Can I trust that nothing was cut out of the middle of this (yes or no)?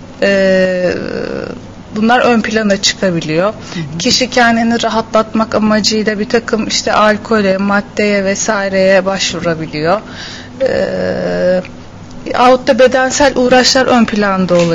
yes